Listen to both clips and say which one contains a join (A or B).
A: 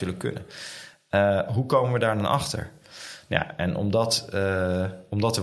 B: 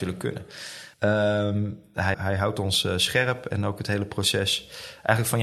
B